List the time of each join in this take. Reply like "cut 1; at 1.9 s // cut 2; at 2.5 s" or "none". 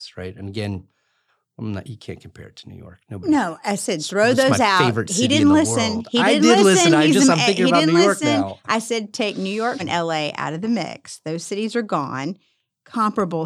cut 1; at 9.8 s